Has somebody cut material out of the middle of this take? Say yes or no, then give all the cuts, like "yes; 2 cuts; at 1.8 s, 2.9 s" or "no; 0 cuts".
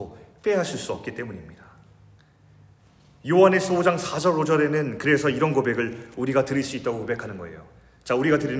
no; 0 cuts